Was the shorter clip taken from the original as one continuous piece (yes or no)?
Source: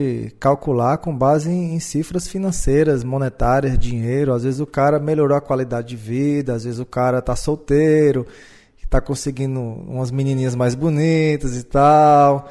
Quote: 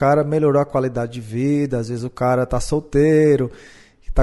yes